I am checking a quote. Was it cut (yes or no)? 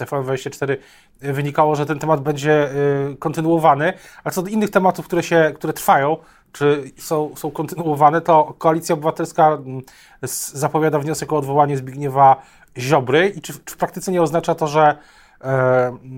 no